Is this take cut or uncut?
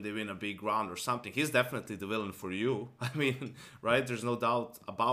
uncut